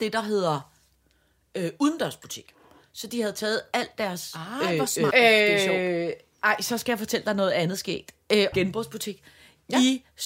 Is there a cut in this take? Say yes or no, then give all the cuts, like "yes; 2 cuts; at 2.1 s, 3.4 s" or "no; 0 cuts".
yes; 2 cuts; at 5.1 s, 8.5 s